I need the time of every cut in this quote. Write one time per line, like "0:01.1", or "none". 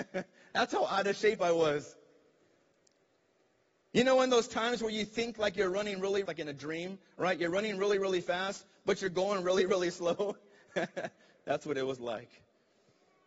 0:06.3